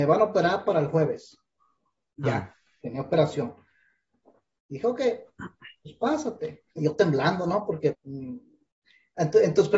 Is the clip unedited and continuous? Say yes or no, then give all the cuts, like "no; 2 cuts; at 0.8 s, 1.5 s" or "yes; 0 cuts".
no; 2 cuts; at 6.7 s, 7.9 s